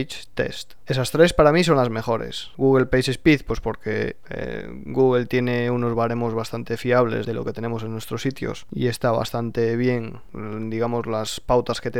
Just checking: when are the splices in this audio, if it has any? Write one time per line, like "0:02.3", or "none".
0:07.2